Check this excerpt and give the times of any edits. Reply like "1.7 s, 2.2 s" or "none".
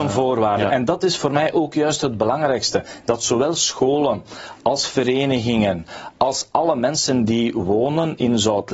none

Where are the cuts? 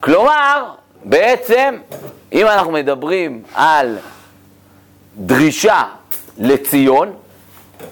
none

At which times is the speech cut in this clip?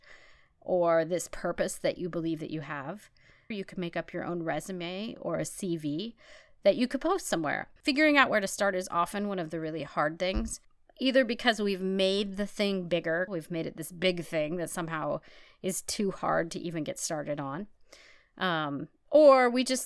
3.5 s, 7.8 s, 13.3 s

